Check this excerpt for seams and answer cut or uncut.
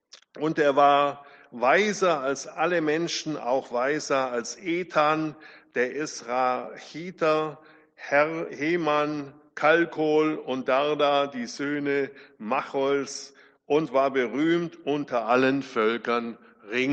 uncut